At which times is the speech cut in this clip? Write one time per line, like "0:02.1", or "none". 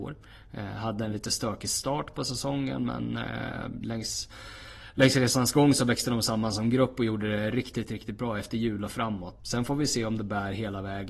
0:09.4